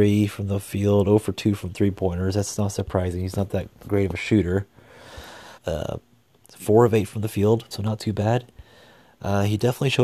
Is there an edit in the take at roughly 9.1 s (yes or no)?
no